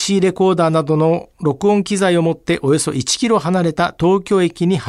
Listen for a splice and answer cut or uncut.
uncut